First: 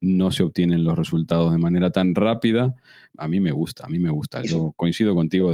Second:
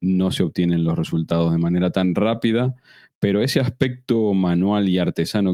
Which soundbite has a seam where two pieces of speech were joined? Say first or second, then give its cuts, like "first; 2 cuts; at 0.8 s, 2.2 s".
first; 1 cut; at 3.1 s